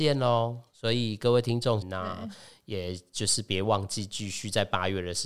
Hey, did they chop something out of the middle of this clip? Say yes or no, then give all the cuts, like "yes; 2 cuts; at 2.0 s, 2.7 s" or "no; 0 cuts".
yes; 1 cut; at 1.8 s